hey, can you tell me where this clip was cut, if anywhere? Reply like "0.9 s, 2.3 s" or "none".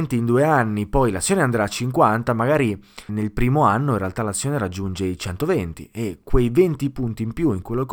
3.1 s